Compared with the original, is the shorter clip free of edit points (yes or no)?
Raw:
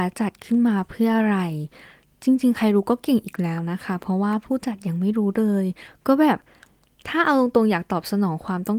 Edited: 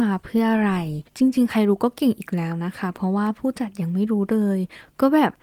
no